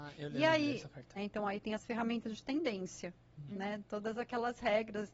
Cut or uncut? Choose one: cut